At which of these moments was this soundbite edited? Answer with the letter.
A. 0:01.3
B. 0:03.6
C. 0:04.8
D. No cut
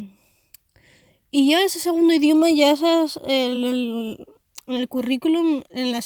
D